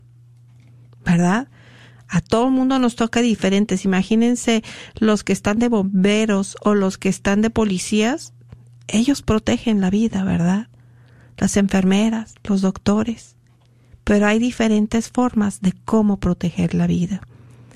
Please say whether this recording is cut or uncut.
uncut